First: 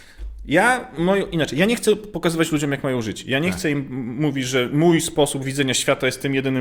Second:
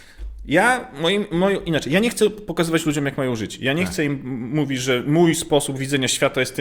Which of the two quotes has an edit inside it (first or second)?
first